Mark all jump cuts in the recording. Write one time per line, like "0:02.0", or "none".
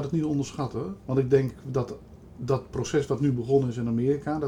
0:01.0